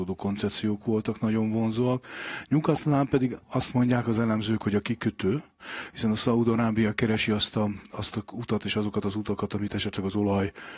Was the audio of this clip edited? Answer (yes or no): no